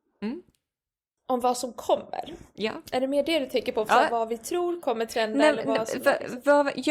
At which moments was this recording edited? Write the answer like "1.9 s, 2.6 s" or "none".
none